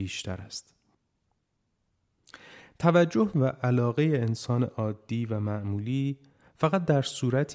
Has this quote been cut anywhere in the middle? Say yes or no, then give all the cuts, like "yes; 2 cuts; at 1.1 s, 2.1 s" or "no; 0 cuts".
no; 0 cuts